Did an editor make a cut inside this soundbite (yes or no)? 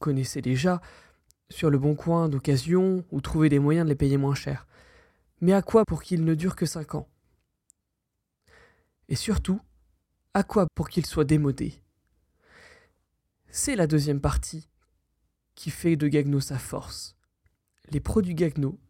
yes